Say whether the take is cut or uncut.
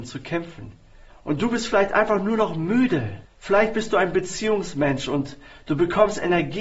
cut